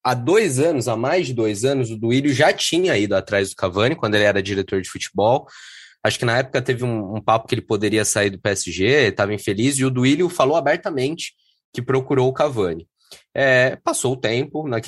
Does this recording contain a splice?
no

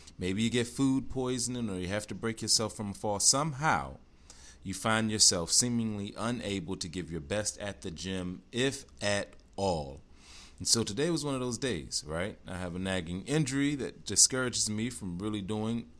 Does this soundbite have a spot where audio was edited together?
no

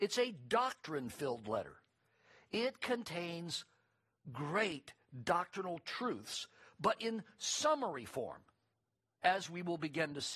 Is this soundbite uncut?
yes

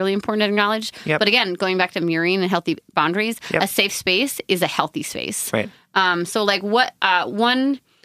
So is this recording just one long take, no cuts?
yes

